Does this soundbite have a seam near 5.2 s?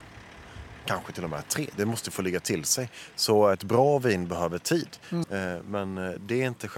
yes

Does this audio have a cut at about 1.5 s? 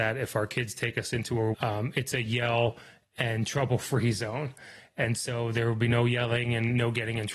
yes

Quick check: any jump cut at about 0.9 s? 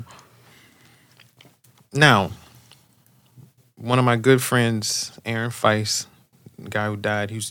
no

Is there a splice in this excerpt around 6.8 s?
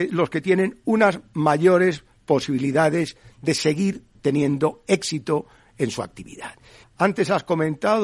yes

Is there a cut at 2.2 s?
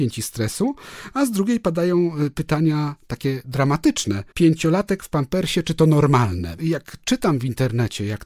no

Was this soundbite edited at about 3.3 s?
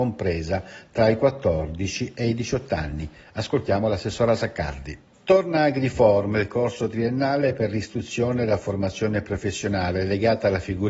no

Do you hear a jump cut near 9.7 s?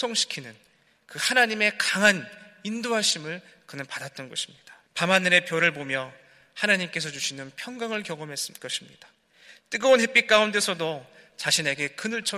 no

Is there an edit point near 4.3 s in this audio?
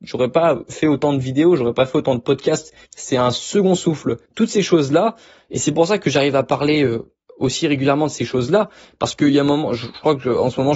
yes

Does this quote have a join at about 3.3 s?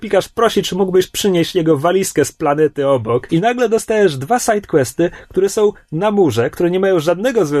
yes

